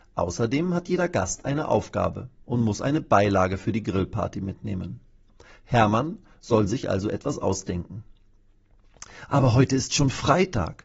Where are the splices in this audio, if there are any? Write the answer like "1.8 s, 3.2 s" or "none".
none